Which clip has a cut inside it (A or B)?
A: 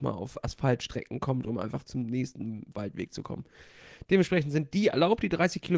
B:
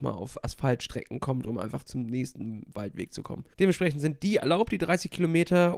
B